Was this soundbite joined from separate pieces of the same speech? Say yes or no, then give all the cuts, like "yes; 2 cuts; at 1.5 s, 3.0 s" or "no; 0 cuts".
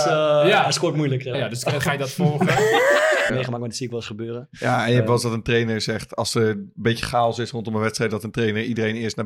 yes; 2 cuts; at 1.3 s, 3.3 s